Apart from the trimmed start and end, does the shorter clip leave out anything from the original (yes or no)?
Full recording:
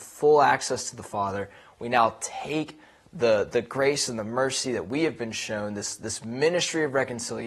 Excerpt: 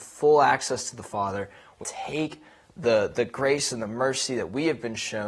yes